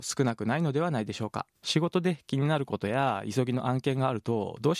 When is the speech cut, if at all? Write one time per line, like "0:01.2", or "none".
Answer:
0:01.6